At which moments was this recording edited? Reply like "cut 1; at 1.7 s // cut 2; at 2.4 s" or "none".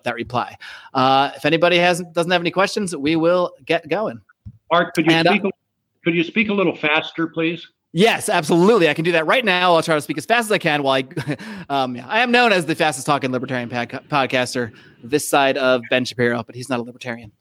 none